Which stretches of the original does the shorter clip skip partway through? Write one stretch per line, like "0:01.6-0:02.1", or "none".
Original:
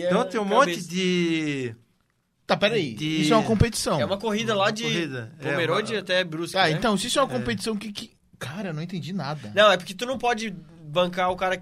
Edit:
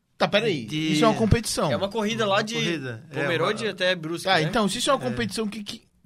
none